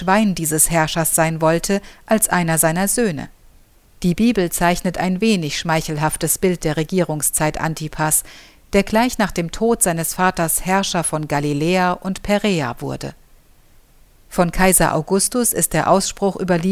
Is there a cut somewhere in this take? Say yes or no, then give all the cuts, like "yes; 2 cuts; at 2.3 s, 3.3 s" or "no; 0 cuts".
yes; 2 cuts; at 3.9 s, 14.1 s